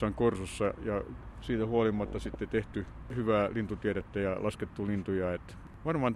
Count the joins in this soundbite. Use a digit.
0